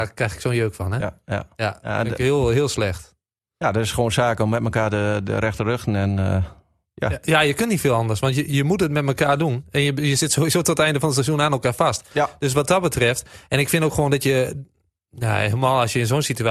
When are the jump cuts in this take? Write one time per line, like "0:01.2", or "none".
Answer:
none